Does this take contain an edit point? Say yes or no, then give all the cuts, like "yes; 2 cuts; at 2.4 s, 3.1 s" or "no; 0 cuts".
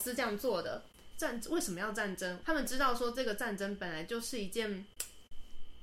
yes; 2 cuts; at 1.1 s, 2.4 s